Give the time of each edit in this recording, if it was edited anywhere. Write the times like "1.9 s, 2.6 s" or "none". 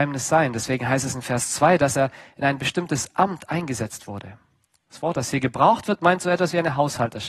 none